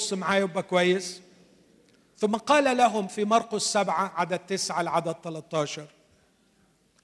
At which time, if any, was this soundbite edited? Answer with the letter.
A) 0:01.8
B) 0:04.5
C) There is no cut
C